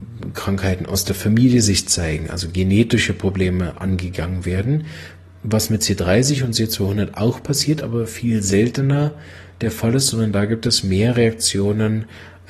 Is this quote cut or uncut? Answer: uncut